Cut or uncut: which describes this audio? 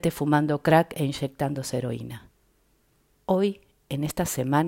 cut